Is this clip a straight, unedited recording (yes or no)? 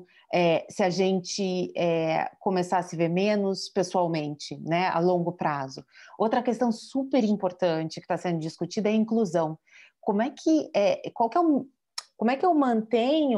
yes